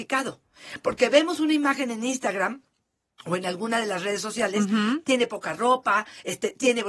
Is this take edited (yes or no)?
no